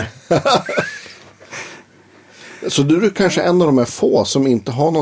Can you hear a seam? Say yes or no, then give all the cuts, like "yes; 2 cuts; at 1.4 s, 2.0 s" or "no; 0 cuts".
no; 0 cuts